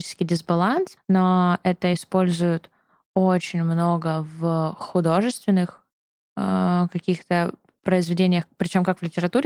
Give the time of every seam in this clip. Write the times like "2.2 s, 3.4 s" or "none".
1.0 s

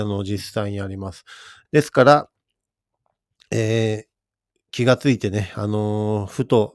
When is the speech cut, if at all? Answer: 1.7 s

